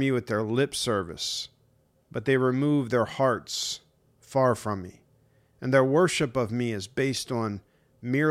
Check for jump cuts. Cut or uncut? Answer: uncut